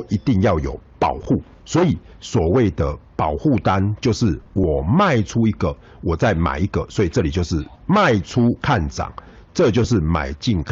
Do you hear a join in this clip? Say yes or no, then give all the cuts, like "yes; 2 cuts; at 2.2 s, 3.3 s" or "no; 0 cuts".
yes; 1 cut; at 7.7 s